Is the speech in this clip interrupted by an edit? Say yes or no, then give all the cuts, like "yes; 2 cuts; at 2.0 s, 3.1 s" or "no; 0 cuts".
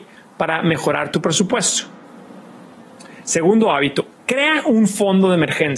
no; 0 cuts